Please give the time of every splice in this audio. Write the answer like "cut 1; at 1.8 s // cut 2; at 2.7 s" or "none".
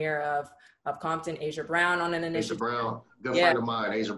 none